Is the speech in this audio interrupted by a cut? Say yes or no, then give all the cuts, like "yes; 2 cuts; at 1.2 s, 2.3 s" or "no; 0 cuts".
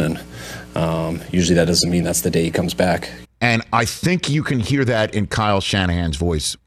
yes; 1 cut; at 3.2 s